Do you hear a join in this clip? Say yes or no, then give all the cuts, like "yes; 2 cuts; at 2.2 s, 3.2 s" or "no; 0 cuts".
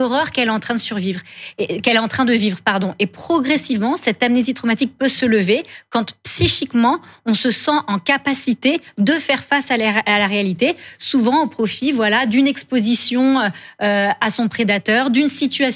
no; 0 cuts